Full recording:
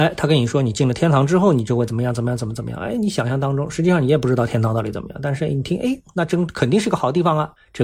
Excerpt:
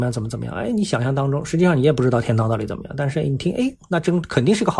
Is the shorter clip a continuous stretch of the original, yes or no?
yes